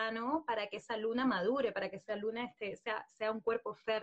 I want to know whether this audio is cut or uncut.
uncut